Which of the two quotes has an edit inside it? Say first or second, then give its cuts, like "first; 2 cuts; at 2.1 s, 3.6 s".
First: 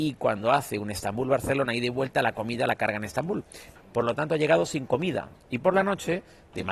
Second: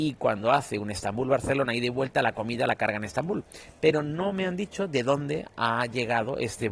first; 2 cuts; at 3.8 s, 5.4 s